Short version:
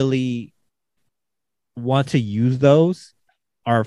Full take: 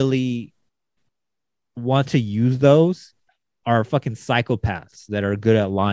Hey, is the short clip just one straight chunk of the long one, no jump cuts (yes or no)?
yes